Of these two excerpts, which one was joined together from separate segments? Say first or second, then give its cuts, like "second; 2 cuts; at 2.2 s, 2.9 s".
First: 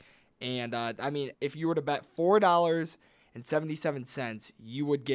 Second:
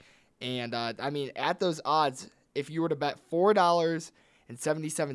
first; 1 cut; at 1.3 s